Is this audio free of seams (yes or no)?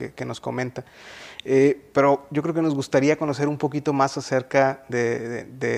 yes